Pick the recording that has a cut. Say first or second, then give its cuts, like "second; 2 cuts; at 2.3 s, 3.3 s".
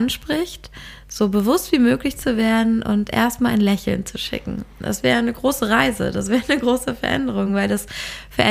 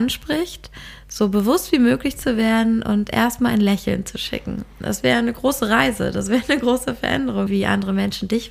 second; 1 cut; at 7.5 s